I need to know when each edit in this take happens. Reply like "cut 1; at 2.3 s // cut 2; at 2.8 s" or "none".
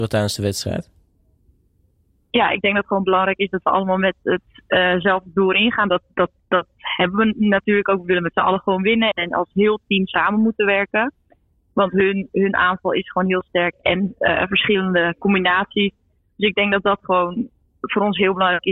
cut 1; at 9.1 s // cut 2; at 12.3 s // cut 3; at 13.7 s